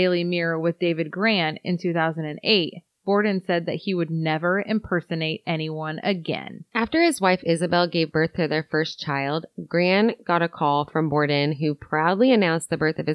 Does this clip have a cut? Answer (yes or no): no